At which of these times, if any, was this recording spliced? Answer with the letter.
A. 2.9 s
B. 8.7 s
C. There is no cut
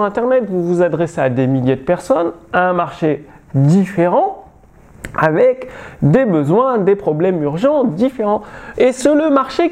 B